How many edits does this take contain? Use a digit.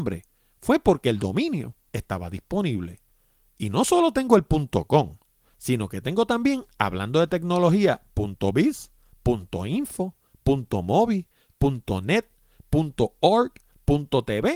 0